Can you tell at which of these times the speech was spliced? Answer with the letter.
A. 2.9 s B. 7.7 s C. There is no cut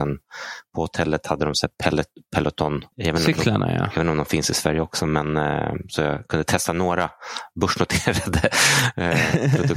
A